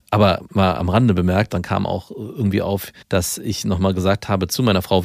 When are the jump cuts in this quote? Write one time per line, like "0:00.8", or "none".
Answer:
0:01.5
0:03.0